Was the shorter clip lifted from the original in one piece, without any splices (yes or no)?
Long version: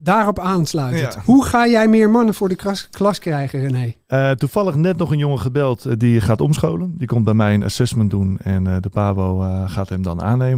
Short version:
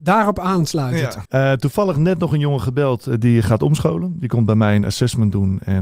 no